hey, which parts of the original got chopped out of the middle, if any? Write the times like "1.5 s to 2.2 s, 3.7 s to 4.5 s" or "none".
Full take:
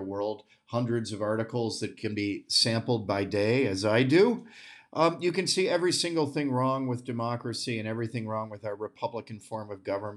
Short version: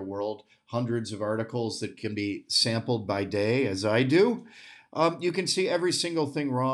none